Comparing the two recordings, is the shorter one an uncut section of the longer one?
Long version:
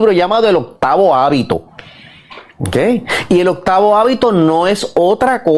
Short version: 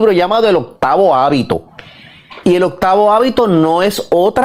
no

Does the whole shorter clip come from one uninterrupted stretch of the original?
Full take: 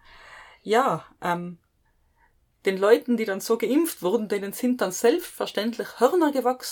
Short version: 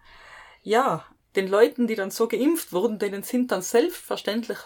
no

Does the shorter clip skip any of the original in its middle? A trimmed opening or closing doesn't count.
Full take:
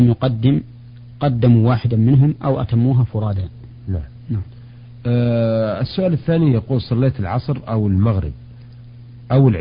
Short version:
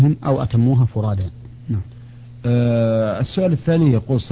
yes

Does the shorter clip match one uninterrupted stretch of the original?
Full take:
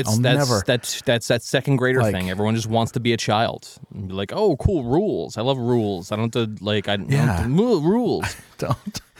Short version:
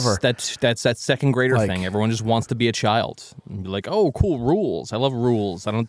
yes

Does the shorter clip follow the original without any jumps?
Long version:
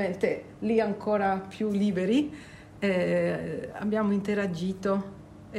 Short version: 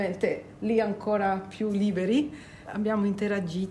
no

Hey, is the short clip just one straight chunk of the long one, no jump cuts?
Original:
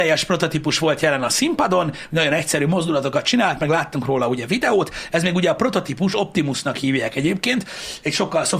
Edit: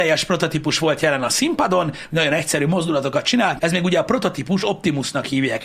no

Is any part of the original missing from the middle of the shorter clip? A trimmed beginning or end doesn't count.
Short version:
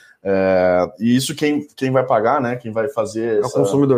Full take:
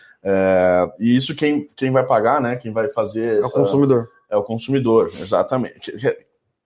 no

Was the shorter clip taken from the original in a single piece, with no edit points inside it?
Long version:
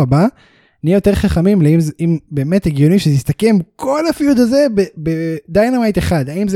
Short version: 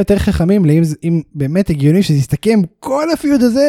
yes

